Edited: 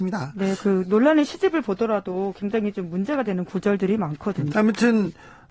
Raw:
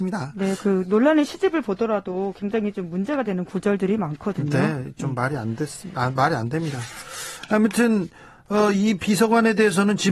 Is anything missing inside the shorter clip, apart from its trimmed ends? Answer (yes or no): yes